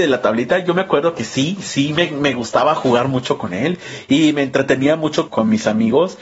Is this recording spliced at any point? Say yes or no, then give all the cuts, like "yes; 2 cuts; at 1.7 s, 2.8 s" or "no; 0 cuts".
yes; 1 cut; at 5.3 s